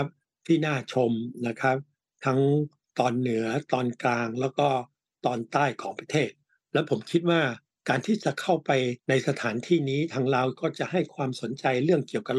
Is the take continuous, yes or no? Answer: no